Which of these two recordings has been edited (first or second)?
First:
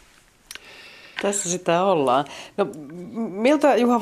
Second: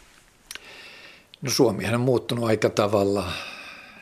first